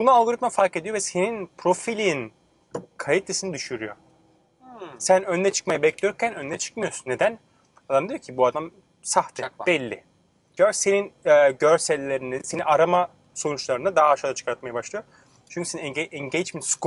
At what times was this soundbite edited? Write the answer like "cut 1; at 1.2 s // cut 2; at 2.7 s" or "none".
cut 1; at 10.6 s